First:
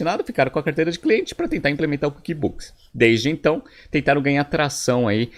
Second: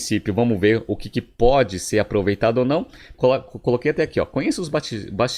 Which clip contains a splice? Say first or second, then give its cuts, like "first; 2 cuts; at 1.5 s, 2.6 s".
second; 1 cut; at 3.1 s